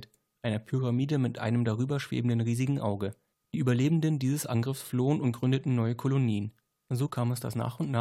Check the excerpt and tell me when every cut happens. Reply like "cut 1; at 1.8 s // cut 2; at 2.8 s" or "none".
cut 1; at 3.3 s // cut 2; at 6.7 s